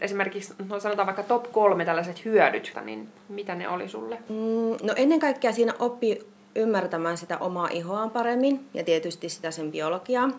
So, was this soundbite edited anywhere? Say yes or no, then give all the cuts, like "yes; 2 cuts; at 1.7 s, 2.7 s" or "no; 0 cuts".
yes; 1 cut; at 2.7 s